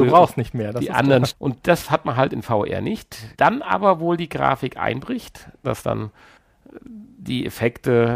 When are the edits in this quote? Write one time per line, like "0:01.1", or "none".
0:01.3
0:03.3
0:05.6